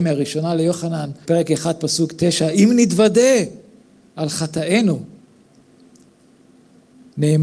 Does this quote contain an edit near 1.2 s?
yes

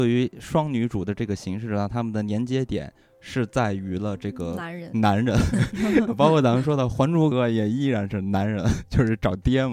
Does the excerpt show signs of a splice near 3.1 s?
no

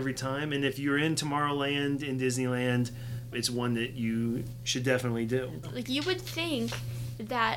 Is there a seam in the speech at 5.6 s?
yes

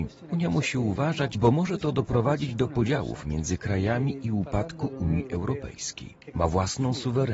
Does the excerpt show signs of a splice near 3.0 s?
no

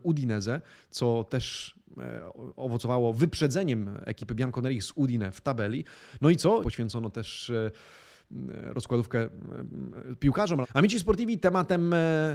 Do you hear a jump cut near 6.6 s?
yes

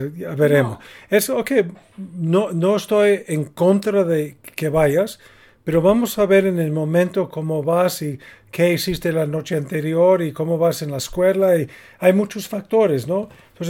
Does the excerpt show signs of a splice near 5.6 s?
no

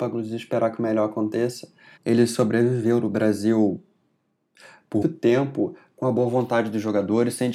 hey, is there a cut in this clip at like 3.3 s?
no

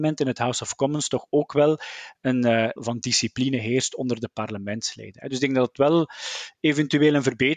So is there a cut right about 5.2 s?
no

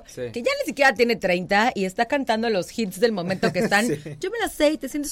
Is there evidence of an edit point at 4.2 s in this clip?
yes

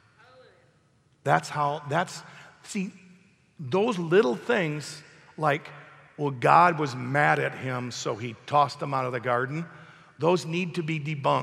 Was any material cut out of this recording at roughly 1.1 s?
no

